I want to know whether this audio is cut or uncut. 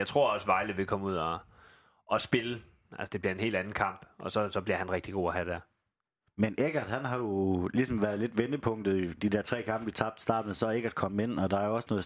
uncut